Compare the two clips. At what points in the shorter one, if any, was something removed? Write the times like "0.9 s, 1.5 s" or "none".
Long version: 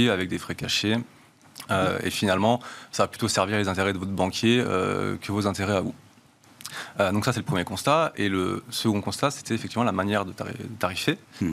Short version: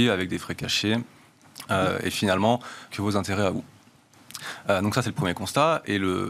2.9 s